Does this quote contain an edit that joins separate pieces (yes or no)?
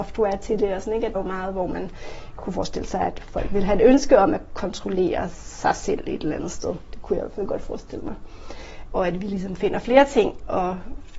yes